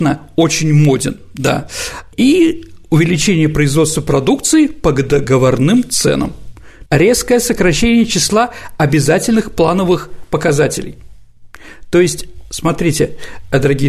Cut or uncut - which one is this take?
cut